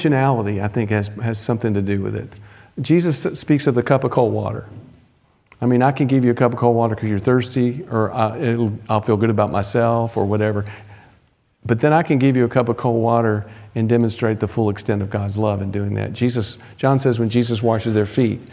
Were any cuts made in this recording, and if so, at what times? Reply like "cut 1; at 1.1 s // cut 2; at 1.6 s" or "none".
none